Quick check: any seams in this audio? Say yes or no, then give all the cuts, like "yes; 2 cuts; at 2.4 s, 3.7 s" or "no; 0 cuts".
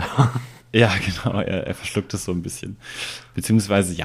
no; 0 cuts